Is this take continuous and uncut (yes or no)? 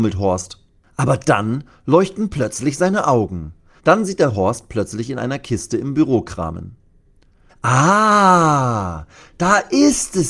no